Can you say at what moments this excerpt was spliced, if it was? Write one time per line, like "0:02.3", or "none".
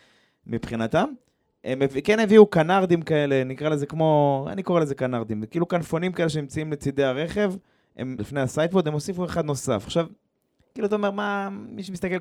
0:08.2